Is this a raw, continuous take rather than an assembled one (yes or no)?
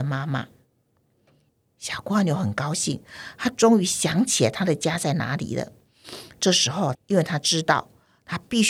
no